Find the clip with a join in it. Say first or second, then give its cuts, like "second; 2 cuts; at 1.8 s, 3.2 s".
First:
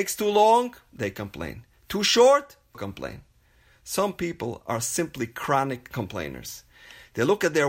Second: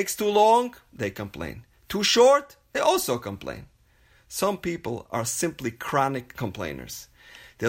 first; 1 cut; at 2.7 s